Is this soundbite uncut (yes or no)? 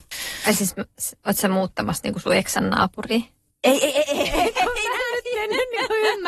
yes